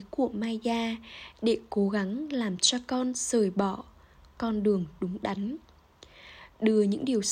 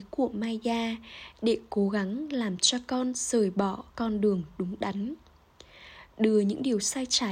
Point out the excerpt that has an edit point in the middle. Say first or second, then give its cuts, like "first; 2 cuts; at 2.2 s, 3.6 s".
second; 1 cut; at 3.9 s